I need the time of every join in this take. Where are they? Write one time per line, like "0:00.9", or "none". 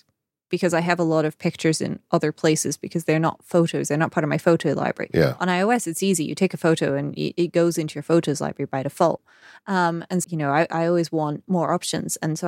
0:10.2
0:11.4